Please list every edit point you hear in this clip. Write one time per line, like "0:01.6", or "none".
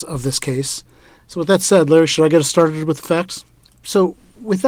0:01.3
0:03.7